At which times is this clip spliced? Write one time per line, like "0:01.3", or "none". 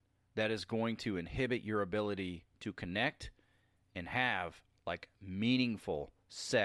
none